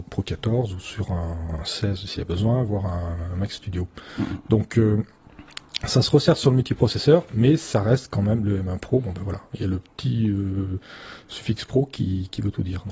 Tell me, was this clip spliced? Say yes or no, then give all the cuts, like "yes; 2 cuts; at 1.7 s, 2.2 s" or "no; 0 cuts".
no; 0 cuts